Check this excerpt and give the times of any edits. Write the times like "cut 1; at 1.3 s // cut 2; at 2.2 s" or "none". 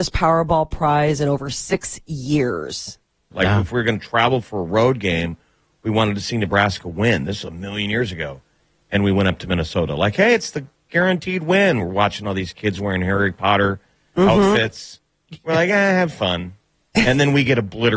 cut 1; at 3.3 s